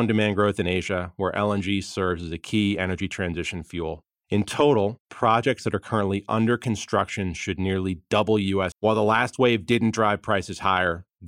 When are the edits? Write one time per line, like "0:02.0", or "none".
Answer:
0:08.7